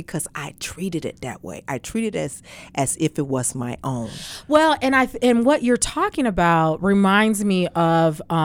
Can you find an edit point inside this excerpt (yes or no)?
no